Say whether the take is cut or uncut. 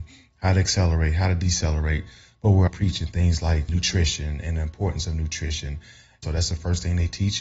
cut